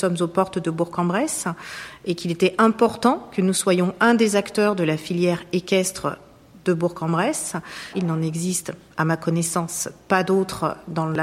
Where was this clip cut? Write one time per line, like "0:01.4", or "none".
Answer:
0:07.9